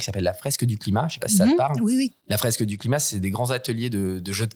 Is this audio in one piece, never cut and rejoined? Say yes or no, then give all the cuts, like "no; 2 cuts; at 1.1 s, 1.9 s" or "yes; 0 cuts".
yes; 0 cuts